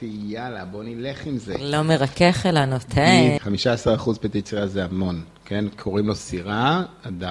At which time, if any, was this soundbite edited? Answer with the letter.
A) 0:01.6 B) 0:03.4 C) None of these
B